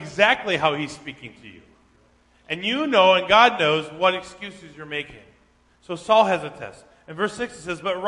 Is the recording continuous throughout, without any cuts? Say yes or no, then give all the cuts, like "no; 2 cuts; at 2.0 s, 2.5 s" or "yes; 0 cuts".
no; 1 cut; at 5.7 s